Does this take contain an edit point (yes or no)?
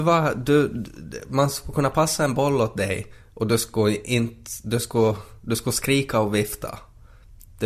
no